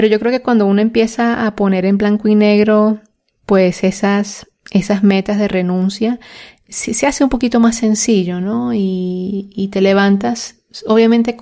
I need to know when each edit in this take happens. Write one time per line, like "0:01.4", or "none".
none